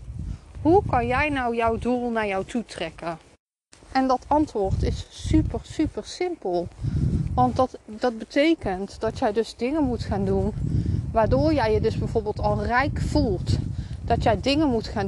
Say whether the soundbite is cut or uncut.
uncut